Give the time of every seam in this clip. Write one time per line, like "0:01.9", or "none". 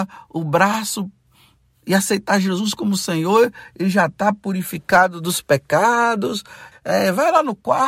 0:06.7